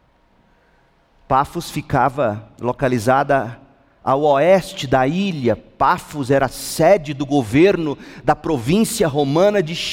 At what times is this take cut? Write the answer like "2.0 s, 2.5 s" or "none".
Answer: none